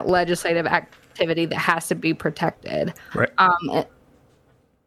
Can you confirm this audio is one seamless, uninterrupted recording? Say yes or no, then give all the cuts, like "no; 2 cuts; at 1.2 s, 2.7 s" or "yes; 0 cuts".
yes; 0 cuts